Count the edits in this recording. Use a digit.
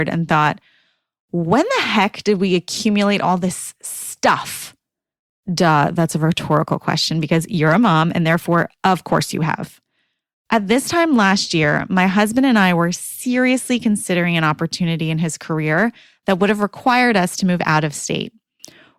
0